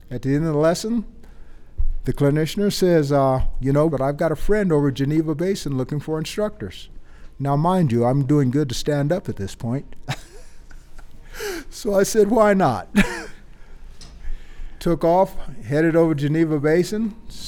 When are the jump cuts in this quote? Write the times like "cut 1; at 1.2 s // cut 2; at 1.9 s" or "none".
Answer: cut 1; at 3.9 s